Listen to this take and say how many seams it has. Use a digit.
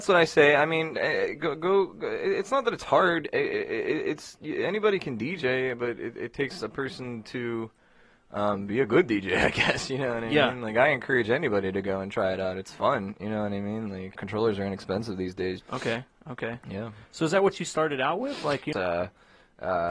3